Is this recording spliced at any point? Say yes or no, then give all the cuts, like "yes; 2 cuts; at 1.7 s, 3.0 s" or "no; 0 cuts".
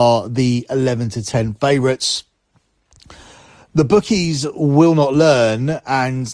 no; 0 cuts